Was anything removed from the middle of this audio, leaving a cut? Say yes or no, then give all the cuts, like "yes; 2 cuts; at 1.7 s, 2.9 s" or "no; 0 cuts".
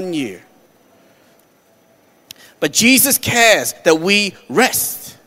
no; 0 cuts